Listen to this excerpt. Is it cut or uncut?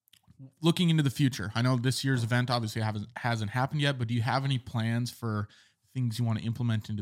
uncut